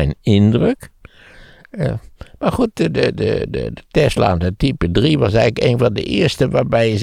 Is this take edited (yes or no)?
no